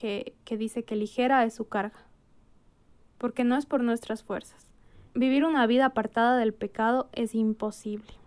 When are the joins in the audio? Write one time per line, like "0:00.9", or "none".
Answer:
0:05.1